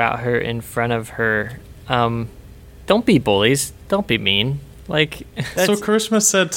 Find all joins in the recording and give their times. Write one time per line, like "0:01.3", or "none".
0:05.6

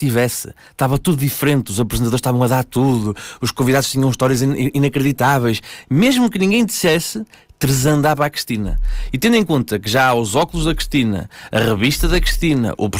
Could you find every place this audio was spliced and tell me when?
none

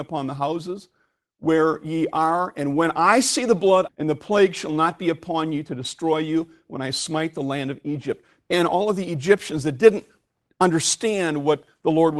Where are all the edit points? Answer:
0:03.9
0:08.4

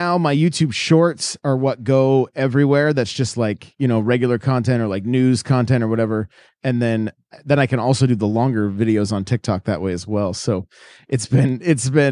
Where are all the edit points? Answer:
none

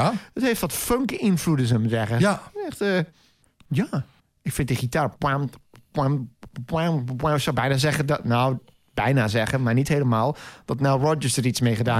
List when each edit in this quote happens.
none

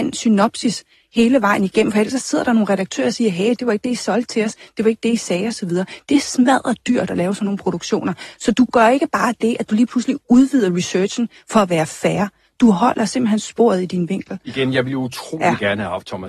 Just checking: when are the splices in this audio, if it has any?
none

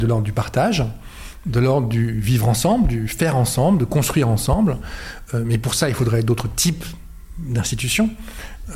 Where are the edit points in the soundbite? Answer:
none

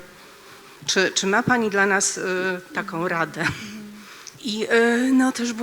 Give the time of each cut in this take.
0:04.4

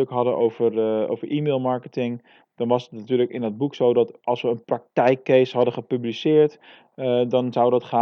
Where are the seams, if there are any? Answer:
none

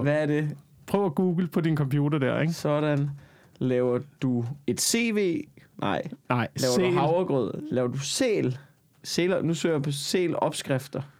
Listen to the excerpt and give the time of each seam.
0:09.0

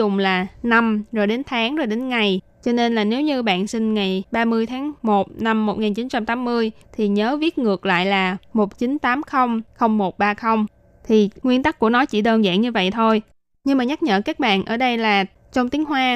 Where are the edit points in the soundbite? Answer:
0:13.5

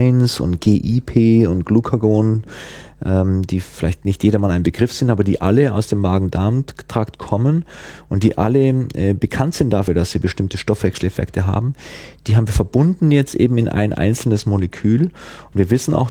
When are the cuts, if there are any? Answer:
none

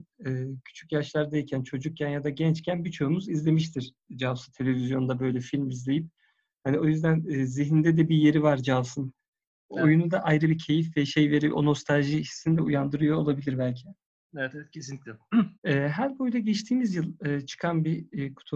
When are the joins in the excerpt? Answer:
0:15.5

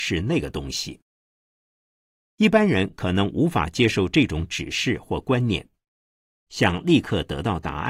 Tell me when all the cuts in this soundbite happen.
0:06.5

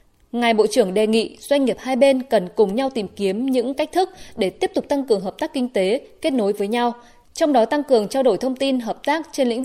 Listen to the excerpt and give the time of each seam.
0:07.3

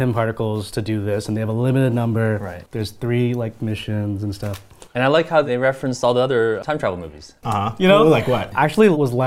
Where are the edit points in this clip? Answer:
0:07.4

